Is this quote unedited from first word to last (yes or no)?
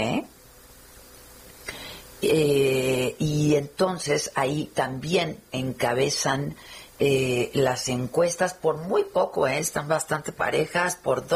yes